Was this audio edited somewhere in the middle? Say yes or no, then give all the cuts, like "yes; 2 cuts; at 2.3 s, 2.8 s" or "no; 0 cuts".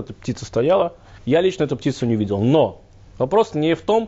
yes; 1 cut; at 1.2 s